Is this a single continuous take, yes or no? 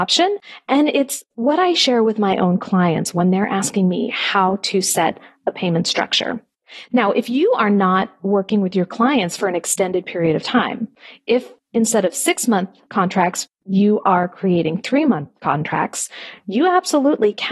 yes